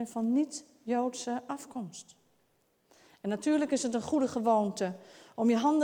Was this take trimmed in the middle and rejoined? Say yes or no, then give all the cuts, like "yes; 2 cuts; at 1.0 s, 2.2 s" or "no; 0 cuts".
no; 0 cuts